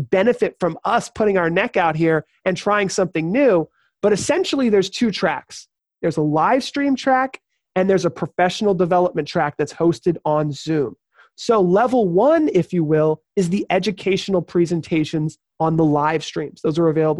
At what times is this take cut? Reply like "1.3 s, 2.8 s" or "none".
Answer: none

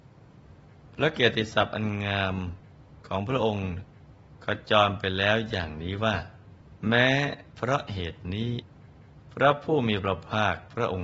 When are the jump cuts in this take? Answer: 6.8 s

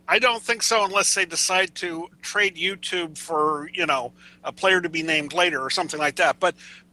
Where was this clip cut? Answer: 2.1 s

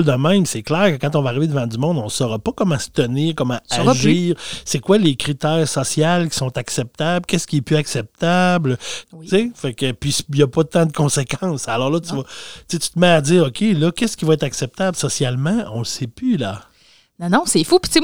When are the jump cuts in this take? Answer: 9.0 s

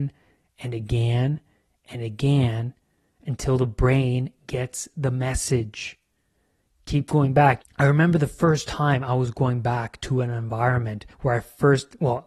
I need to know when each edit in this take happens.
7.6 s, 11.1 s

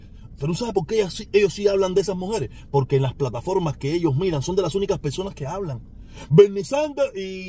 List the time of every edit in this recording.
6.3 s

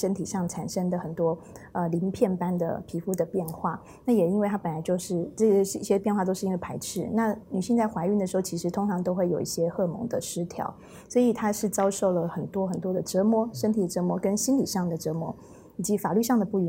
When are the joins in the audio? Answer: none

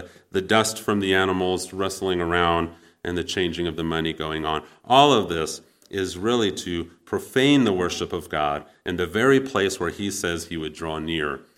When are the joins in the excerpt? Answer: none

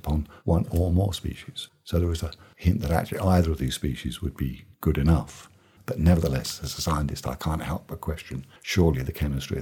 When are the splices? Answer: 5.8 s

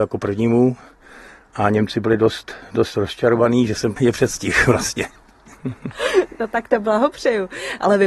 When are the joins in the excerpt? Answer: none

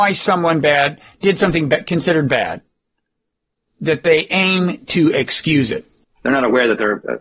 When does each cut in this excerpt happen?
6.0 s

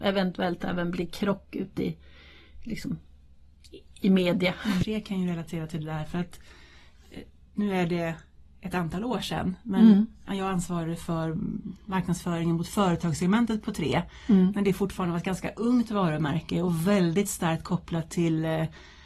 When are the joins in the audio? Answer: 4.8 s

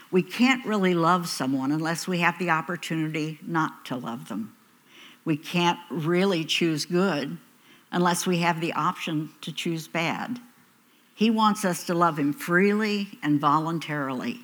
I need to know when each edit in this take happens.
11.1 s

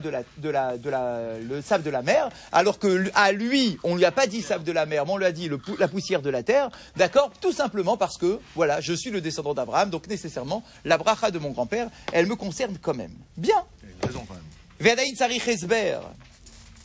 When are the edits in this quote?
none

